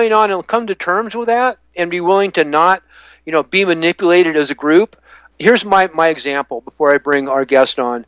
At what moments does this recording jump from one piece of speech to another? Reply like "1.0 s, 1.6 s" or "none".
5.3 s